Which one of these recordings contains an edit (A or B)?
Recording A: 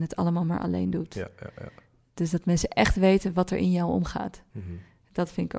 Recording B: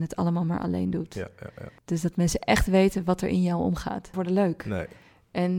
B